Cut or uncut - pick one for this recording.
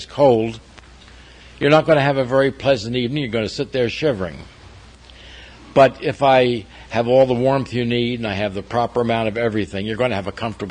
uncut